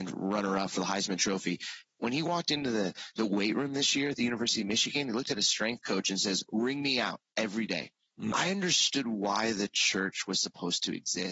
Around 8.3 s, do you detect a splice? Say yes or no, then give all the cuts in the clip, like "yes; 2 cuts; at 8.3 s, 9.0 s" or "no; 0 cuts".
yes; 1 cut; at 8.3 s